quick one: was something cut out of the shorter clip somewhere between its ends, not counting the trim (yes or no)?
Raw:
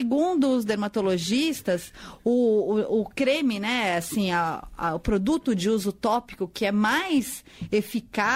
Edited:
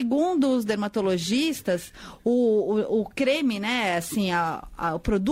no